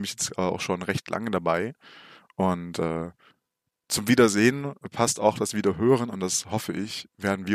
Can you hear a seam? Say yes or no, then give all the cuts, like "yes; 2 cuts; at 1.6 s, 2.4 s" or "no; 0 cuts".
no; 0 cuts